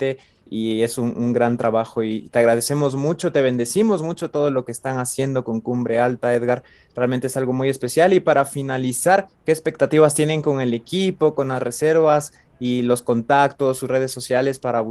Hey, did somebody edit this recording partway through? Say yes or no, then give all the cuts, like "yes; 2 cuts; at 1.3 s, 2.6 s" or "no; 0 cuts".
no; 0 cuts